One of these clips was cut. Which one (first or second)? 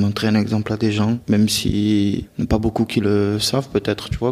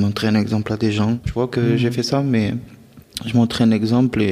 second